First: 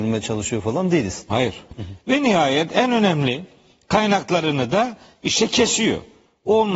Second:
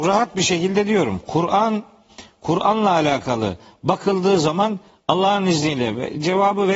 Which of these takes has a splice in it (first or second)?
first